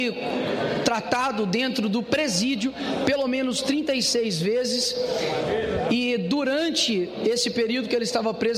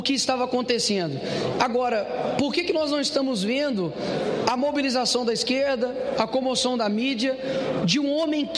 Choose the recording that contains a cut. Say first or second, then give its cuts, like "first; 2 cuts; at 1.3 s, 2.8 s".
second; 1 cut; at 1.5 s